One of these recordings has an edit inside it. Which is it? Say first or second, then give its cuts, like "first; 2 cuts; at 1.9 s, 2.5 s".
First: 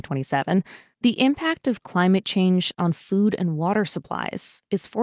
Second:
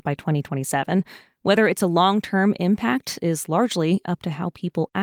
first; 1 cut; at 0.9 s